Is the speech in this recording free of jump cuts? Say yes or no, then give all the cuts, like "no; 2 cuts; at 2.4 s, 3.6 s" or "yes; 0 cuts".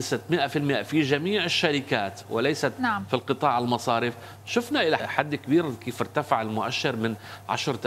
no; 1 cut; at 5.0 s